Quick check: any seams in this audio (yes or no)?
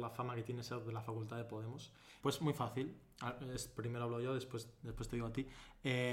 yes